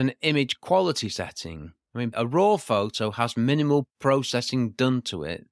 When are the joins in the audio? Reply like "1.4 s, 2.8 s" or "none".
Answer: 2.1 s